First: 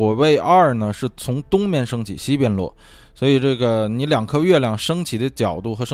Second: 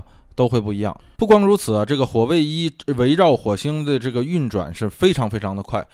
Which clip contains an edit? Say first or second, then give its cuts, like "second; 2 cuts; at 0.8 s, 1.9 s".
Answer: second; 1 cut; at 1.1 s